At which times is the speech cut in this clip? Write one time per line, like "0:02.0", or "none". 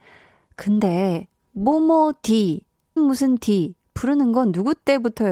0:03.0